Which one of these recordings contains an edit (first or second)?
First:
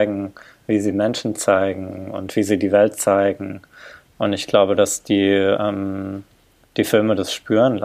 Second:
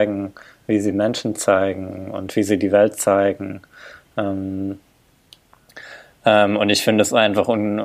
first